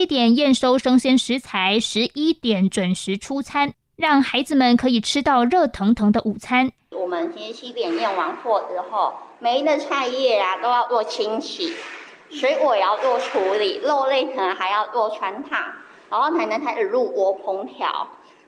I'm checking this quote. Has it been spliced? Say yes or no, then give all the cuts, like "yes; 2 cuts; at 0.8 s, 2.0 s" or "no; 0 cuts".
no; 0 cuts